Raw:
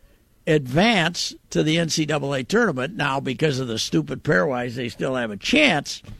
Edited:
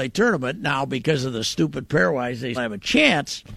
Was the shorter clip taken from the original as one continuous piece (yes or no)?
no